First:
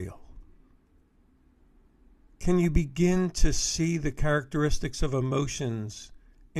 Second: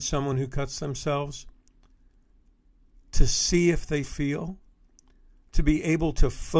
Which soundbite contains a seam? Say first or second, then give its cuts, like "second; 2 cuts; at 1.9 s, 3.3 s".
second; 1 cut; at 4.0 s